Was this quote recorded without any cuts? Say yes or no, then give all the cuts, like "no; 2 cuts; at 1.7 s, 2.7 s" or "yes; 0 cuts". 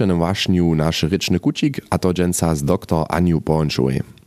yes; 0 cuts